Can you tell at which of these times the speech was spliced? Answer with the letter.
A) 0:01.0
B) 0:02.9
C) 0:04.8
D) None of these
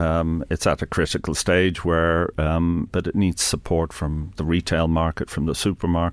B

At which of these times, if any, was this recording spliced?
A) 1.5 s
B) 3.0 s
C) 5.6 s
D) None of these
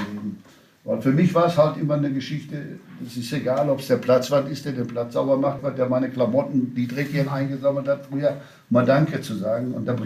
C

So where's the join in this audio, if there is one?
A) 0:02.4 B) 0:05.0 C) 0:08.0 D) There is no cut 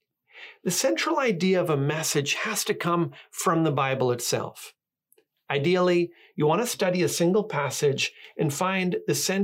D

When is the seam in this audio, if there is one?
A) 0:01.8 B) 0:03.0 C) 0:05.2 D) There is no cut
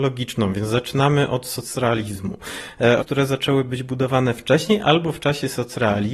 B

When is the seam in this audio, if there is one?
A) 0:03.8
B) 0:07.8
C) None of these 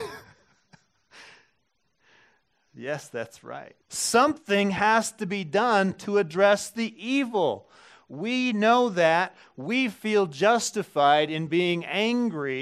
A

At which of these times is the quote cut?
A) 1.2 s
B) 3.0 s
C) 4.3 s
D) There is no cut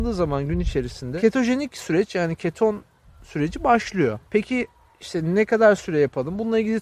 C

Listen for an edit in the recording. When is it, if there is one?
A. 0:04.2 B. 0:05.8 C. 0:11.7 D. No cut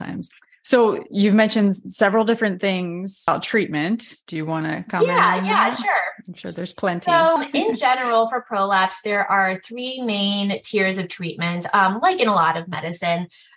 A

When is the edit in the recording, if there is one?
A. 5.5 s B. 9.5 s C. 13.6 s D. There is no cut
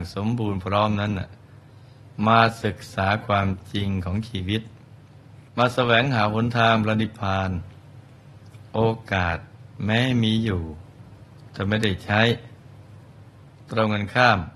A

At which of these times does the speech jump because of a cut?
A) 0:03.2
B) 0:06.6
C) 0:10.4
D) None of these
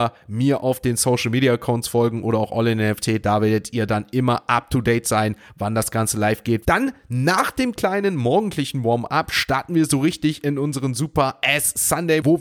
B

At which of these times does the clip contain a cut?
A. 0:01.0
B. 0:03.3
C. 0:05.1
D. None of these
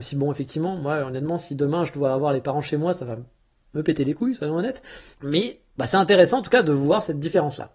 C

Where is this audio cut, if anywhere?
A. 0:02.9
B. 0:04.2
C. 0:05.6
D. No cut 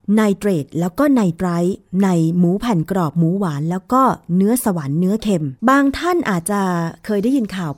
C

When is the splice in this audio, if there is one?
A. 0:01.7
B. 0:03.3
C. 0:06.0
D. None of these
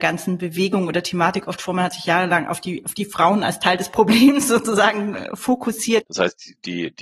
C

